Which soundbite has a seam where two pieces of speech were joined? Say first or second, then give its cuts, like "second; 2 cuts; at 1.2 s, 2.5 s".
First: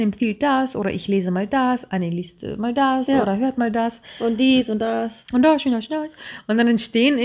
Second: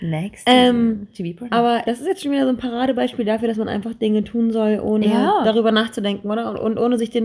second; 1 cut; at 1.8 s